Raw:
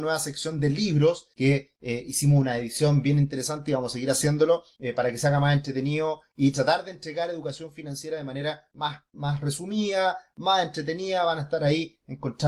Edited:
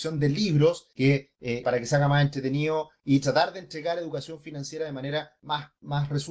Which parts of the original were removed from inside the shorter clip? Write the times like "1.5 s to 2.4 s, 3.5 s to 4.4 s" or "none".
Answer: 2.0 s to 4.9 s